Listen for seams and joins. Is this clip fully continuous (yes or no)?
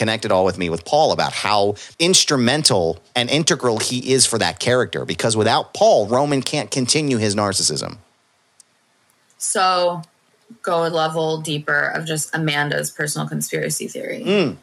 no